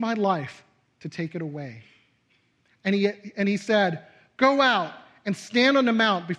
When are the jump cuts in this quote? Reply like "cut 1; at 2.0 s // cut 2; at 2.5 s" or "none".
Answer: none